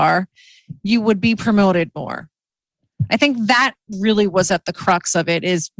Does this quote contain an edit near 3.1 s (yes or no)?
no